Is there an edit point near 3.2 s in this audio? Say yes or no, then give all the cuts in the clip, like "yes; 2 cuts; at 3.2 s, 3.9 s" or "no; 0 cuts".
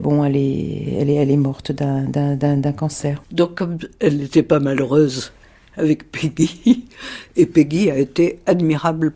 yes; 1 cut; at 3.2 s